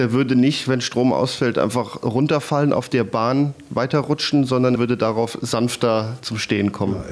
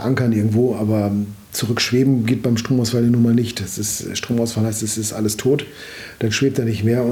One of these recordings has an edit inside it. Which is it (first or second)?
first